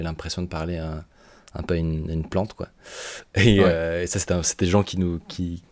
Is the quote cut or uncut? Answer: uncut